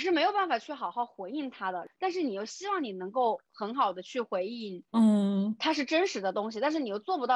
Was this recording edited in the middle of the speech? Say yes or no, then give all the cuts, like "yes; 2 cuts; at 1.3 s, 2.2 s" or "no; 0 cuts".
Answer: no; 0 cuts